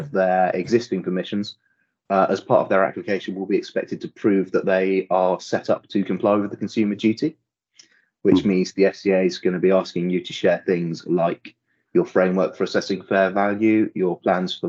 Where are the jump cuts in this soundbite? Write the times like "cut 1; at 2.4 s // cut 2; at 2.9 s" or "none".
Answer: none